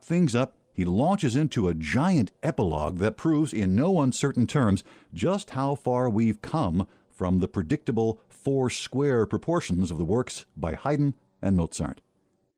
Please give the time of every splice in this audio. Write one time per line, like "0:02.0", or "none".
none